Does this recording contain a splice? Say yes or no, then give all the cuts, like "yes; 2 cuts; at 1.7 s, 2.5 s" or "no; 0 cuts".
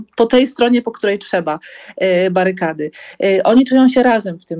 no; 0 cuts